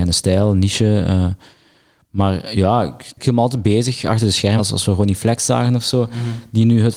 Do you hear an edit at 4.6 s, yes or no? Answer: yes